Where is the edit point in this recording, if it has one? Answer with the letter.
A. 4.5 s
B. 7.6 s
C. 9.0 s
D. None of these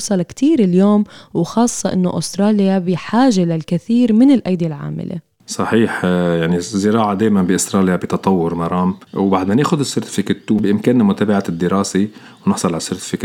C